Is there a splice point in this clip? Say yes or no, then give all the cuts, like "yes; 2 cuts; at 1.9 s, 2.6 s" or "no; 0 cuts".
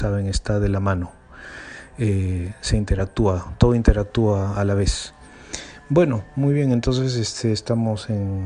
no; 0 cuts